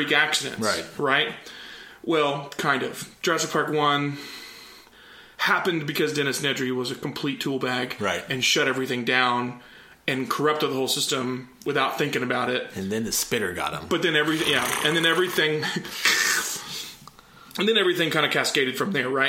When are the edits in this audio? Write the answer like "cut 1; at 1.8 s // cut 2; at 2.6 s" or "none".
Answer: none